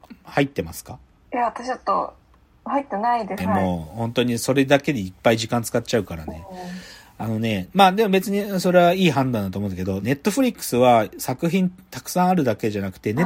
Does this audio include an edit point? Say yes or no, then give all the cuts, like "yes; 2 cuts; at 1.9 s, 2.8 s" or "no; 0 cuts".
yes; 2 cuts; at 3.4 s, 10.0 s